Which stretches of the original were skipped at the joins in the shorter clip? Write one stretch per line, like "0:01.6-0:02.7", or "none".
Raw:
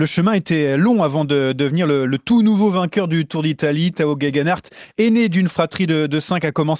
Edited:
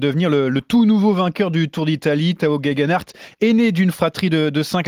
none